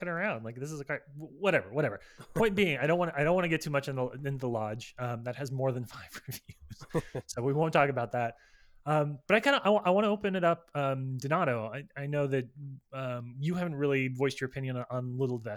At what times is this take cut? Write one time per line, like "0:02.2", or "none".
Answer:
none